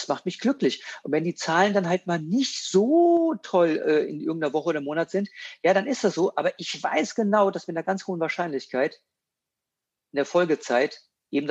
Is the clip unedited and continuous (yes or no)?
yes